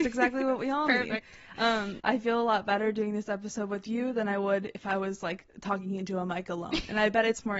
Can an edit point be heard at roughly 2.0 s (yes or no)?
yes